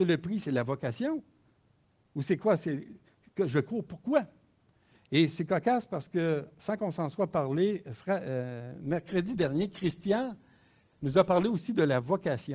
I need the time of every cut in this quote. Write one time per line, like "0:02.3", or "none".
none